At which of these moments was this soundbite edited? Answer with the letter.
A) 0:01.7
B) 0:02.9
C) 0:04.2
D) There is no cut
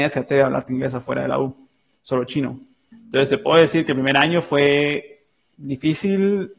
B